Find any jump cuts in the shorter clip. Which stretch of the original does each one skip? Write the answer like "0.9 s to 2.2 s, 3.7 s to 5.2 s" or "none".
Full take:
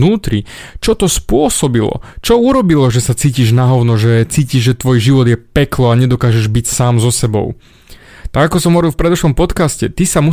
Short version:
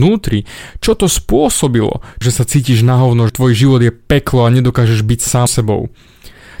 2.2 s to 2.9 s, 4.0 s to 4.7 s, 6.9 s to 7.1 s